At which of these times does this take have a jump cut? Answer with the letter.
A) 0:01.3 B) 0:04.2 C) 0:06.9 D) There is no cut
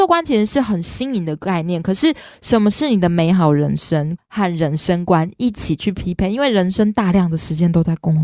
B